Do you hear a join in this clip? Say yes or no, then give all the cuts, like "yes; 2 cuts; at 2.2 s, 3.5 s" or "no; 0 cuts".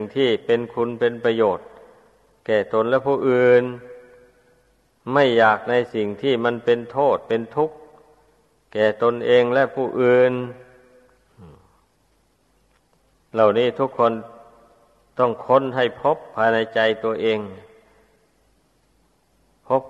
no; 0 cuts